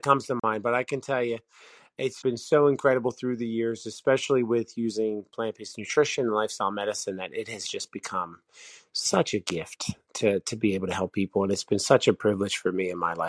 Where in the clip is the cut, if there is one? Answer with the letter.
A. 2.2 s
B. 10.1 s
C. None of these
A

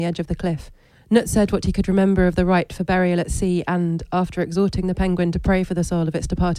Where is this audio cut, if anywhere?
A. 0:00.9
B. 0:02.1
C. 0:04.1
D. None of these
A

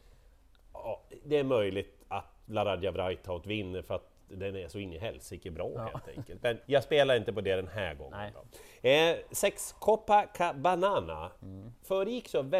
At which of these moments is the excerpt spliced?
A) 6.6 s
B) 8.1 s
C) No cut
A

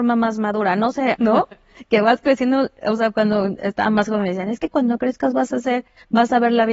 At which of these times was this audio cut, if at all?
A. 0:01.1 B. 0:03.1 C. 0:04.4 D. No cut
A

